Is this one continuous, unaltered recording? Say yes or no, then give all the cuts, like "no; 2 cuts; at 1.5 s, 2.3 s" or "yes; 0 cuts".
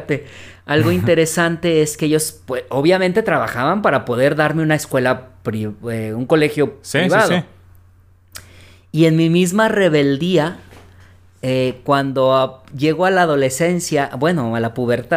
yes; 0 cuts